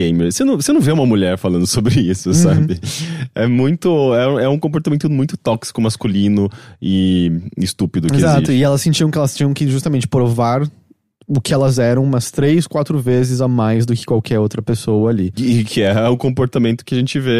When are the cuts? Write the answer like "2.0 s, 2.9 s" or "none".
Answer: none